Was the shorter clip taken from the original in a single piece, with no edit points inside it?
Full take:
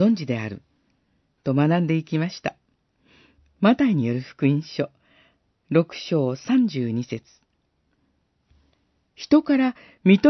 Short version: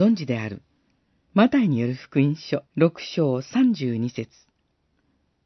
no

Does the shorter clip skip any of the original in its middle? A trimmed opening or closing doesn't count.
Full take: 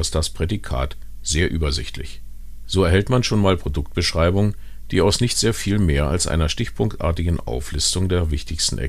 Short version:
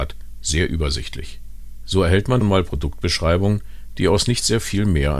yes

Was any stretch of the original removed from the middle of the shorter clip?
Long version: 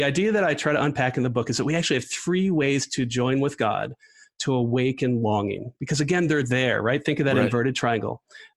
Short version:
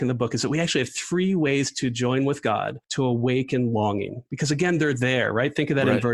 yes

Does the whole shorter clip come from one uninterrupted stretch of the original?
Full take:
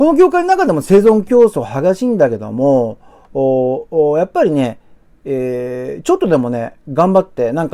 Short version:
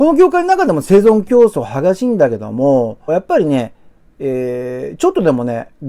no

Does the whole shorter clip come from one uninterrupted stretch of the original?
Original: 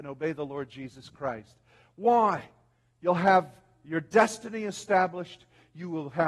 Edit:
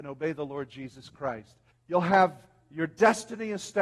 no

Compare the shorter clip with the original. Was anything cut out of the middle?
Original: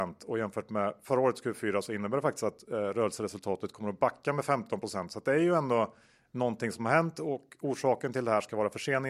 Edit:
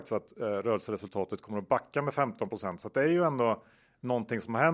no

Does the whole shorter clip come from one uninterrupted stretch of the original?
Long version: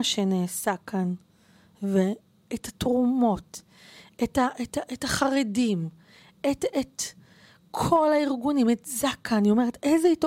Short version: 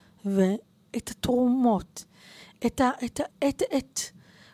no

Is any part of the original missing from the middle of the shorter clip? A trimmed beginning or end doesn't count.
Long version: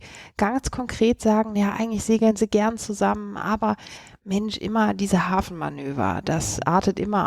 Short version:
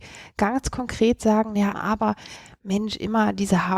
yes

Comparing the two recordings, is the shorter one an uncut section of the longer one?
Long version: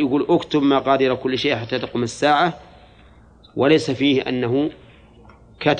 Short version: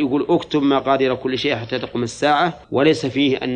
no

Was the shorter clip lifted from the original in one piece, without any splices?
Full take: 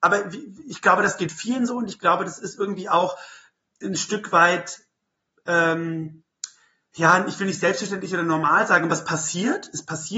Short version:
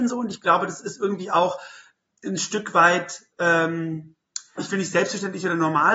no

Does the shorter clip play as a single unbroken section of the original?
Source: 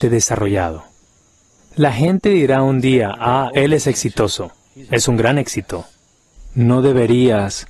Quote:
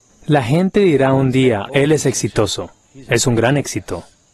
no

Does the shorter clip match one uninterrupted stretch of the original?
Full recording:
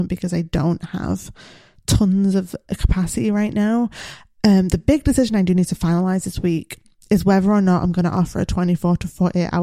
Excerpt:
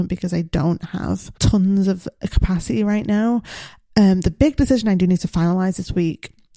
no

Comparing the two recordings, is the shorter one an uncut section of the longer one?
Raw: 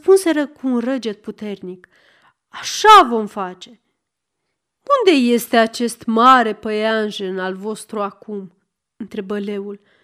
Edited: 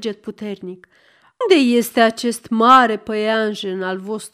no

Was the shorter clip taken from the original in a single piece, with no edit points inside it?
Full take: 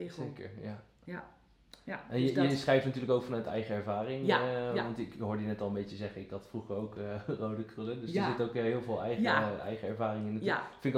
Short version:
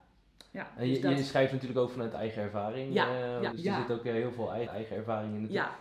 no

